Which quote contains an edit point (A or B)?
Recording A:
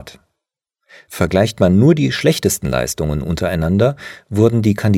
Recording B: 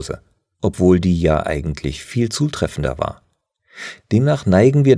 B